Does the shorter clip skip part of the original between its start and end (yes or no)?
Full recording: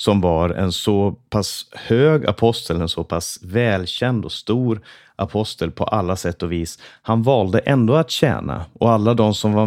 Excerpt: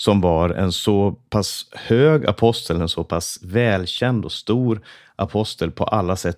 no